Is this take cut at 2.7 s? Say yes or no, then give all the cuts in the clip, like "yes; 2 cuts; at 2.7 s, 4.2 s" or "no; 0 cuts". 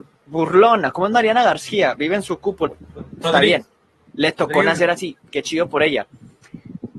yes; 1 cut; at 2.7 s